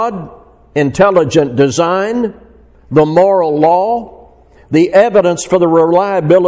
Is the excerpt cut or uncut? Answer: uncut